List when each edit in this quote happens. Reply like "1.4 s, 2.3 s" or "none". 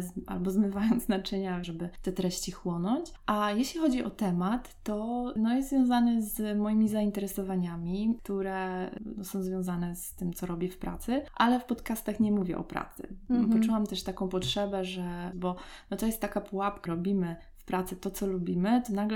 1.6 s, 15.3 s, 16.9 s